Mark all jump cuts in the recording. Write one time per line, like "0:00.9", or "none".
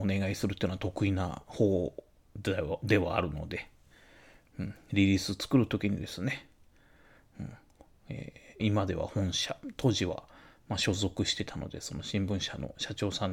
0:08.6

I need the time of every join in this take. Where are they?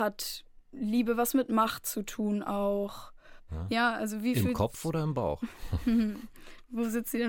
0:03.5

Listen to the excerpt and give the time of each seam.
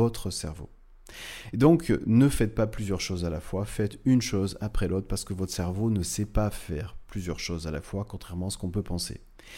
none

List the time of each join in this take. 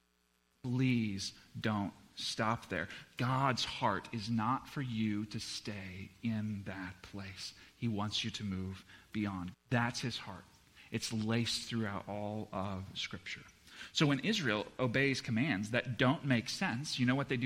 0:09.5

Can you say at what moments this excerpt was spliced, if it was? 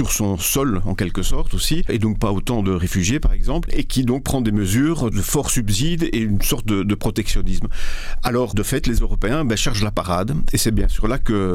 none

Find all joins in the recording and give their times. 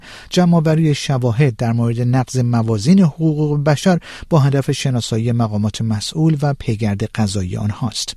none

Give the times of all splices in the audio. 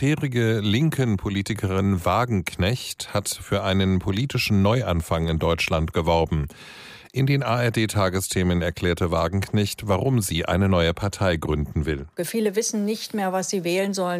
0:12.2

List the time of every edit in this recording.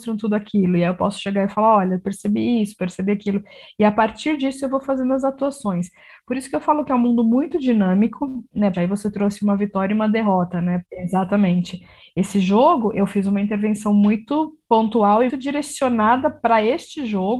0:08.7
0:10.8
0:15.3

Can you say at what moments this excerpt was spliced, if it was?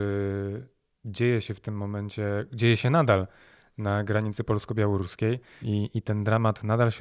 0:05.6

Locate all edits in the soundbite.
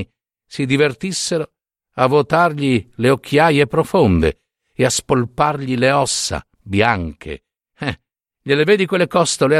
0:07.6

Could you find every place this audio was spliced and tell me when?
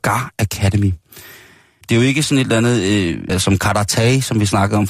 0:01.8
0:03.3

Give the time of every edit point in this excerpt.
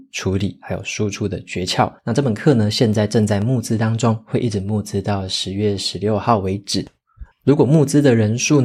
0:02.0
0:07.3

